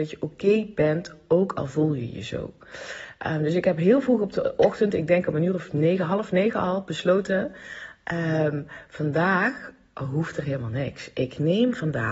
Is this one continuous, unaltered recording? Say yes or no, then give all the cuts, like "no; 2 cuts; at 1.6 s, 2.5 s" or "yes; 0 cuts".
yes; 0 cuts